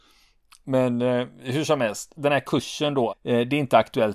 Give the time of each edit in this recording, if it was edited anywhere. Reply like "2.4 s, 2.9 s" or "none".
3.1 s